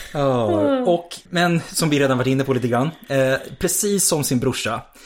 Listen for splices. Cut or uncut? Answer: cut